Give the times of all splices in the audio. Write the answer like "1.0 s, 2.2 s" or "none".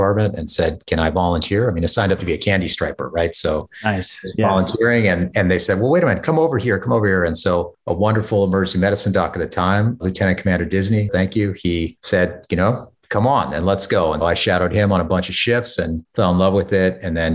11.1 s, 14.2 s